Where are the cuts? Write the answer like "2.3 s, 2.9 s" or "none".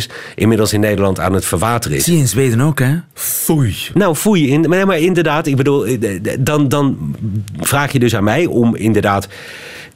3.1 s

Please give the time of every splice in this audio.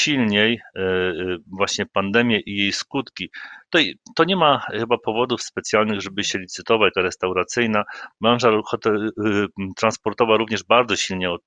6.9 s

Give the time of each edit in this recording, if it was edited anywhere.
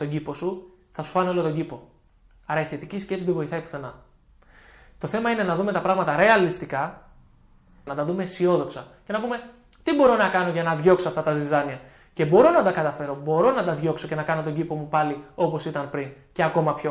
7.9 s

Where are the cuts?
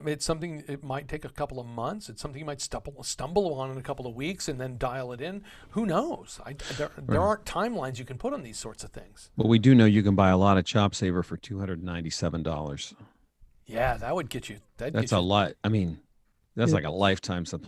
15.6 s

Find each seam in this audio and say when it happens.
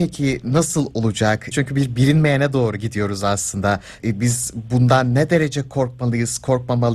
1.5 s, 4.0 s

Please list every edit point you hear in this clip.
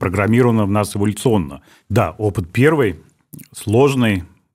1.8 s

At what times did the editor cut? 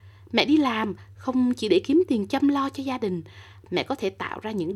3.6 s

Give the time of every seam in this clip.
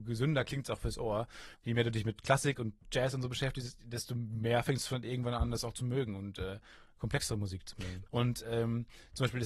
1.5 s, 8.1 s

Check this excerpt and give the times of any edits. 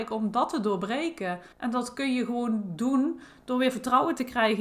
1.5 s

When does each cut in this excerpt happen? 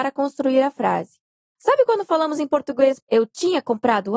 3.0 s

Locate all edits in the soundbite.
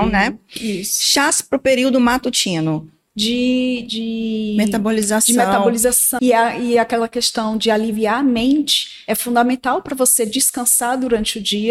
3.1 s, 6.2 s

